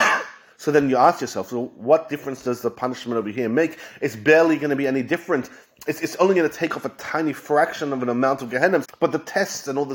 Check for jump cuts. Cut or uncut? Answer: cut